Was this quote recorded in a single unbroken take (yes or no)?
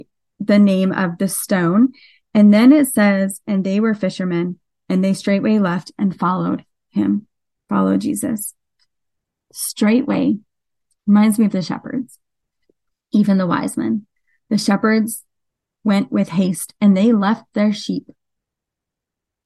yes